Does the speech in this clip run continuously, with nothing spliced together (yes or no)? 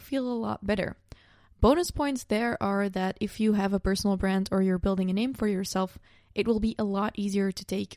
yes